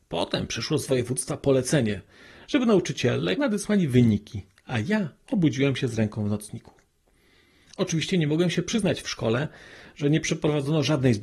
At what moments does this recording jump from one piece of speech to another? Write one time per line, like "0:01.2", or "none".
0:03.4